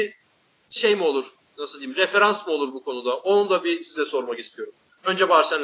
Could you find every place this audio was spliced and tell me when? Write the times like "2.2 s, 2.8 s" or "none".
none